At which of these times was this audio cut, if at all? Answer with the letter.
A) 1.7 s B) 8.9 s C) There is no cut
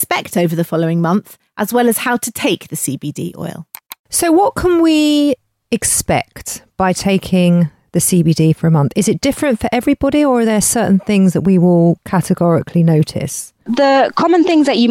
C